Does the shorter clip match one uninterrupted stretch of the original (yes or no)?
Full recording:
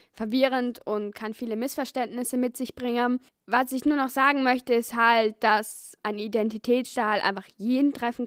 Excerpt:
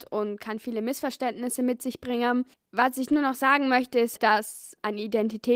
no